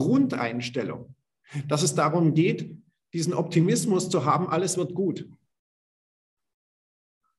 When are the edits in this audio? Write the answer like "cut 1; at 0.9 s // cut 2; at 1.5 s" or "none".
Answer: none